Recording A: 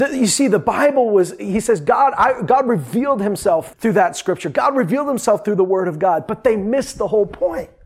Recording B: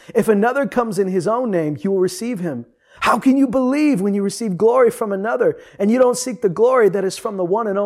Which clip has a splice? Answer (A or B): A